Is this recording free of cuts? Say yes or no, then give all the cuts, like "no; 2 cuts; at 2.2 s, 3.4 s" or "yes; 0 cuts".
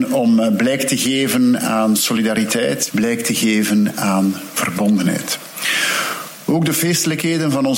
no; 1 cut; at 2.9 s